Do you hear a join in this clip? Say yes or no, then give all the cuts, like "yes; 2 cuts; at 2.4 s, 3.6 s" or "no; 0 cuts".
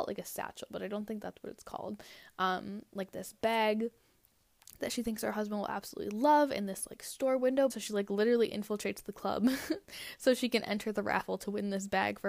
yes; 1 cut; at 7.7 s